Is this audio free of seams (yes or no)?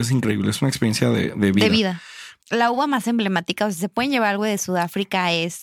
no